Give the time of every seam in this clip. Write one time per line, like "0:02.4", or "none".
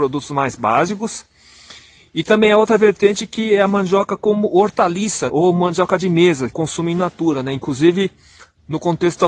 0:05.3
0:06.5